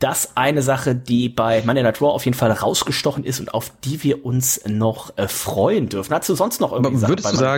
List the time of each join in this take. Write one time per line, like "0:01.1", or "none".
none

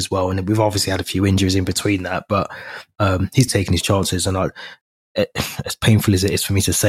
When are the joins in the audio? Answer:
0:03.5

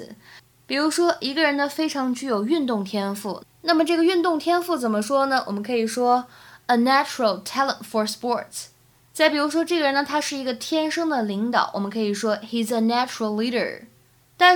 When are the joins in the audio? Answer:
none

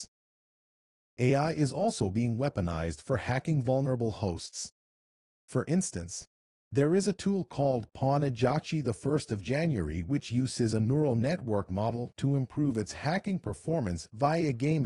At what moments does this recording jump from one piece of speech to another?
none

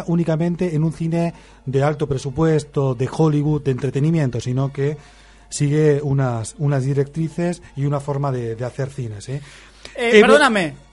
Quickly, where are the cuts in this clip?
none

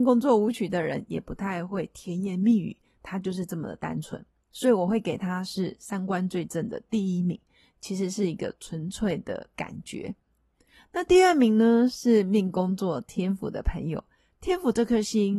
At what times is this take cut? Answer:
none

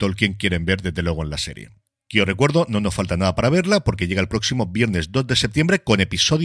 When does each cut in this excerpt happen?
none

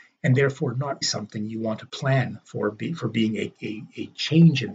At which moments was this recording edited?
0:01.0

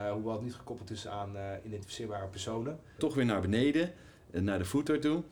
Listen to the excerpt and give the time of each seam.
0:03.0

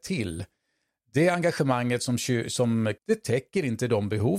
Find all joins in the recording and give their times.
0:03.0

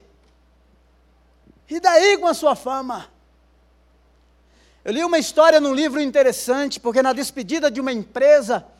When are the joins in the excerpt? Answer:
0:01.6

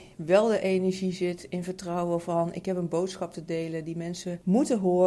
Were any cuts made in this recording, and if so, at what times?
none

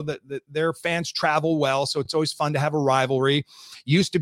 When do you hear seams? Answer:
none

